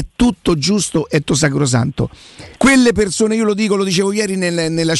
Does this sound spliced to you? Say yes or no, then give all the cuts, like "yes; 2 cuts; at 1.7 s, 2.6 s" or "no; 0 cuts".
yes; 2 cuts; at 1.2 s, 2.6 s